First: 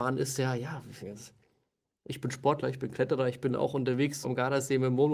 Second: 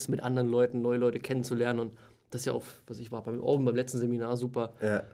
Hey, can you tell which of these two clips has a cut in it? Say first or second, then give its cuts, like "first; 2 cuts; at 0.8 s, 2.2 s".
first; 2 cuts; at 1.0 s, 4.2 s